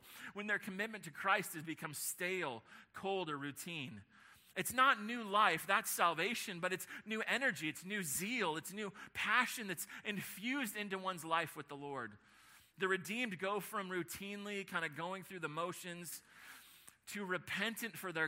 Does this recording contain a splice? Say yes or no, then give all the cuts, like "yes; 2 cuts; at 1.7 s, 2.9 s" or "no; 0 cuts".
no; 0 cuts